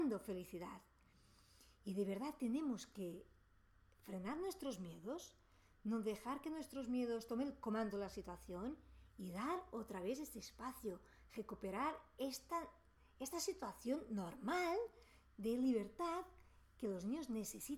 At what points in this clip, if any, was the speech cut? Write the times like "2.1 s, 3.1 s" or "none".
none